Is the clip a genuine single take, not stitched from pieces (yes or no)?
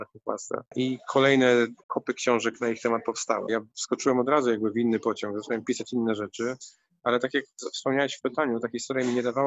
no